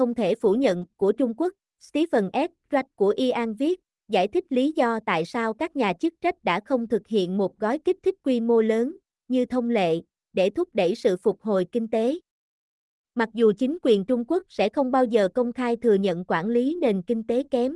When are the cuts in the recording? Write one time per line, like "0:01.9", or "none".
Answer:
none